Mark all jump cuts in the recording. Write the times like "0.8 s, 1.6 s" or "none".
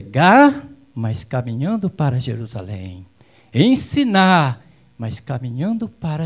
none